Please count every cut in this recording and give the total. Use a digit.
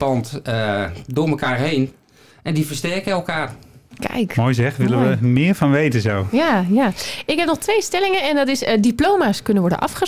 0